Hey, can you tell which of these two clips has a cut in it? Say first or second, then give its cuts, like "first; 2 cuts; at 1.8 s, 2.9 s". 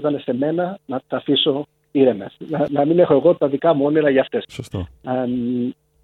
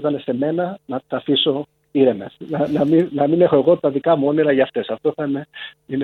first; 2 cuts; at 2.7 s, 4.4 s